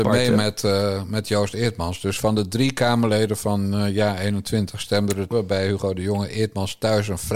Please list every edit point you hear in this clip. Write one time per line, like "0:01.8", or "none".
0:05.3